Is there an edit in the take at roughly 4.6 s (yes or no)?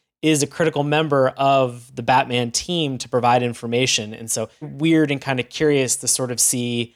yes